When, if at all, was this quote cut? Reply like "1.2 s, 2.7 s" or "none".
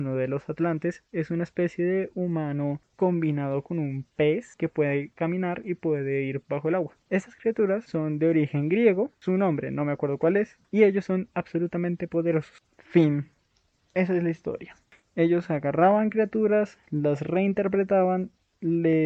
12.6 s